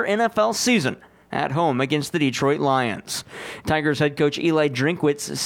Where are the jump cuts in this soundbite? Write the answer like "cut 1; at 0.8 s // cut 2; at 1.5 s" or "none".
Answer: cut 1; at 3.6 s